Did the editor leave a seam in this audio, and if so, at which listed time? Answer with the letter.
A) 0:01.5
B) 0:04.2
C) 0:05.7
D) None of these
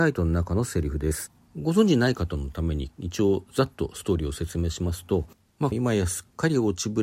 C